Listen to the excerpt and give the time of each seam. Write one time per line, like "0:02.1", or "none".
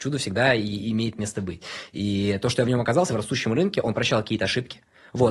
none